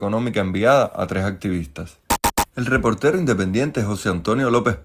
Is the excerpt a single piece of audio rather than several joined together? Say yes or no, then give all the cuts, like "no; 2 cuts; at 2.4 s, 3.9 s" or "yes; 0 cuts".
yes; 0 cuts